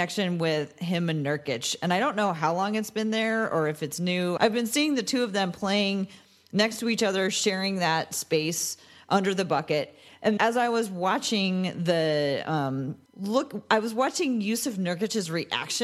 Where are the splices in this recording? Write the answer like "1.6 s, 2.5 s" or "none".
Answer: 4.4 s, 10.4 s, 13.1 s